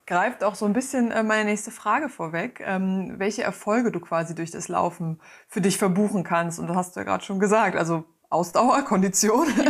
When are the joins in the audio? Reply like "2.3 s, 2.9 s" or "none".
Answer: none